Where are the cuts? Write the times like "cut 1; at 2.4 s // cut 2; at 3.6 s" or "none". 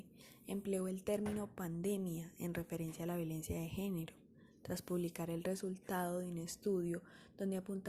none